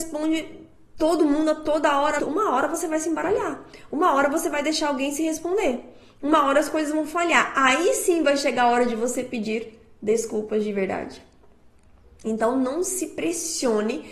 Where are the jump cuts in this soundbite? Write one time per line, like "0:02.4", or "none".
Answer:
0:02.2